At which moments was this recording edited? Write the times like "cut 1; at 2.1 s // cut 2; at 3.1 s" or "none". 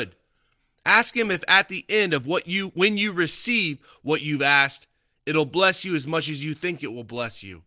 none